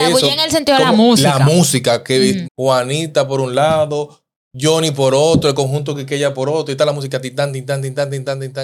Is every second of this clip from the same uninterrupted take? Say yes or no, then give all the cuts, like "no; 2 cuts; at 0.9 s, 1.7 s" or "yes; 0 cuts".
no; 1 cut; at 2.4 s